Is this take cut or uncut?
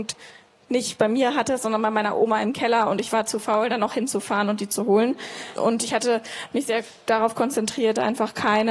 cut